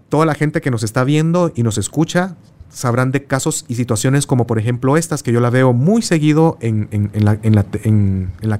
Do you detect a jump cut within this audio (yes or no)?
no